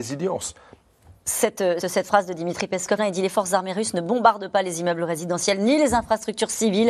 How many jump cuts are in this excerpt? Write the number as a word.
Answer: two